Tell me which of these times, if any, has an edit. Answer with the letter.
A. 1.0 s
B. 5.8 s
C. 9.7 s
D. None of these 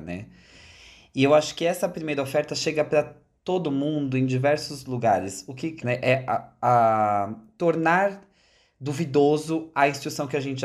B